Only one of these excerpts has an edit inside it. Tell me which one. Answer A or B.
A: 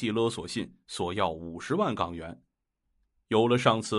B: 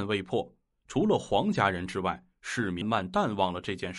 B